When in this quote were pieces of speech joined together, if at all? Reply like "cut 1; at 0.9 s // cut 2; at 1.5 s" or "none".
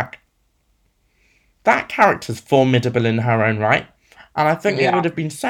none